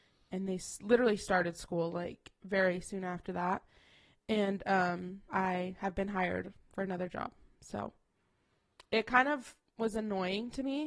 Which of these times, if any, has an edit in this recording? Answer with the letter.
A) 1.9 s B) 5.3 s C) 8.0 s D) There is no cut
B